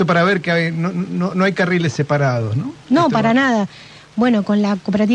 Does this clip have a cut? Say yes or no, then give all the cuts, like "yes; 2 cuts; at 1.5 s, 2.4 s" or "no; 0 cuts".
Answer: yes; 1 cut; at 2.8 s